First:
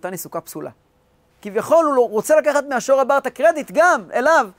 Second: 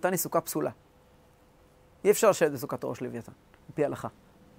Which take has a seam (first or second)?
first